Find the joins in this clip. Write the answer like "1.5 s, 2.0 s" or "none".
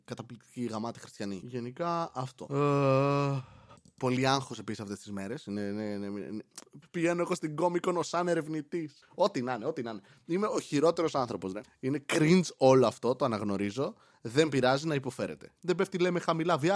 6.8 s, 15.6 s